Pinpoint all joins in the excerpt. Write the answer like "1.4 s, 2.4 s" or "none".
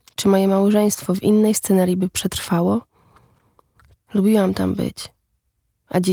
3.9 s